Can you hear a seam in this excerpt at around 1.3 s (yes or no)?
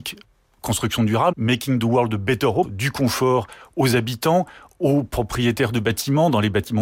yes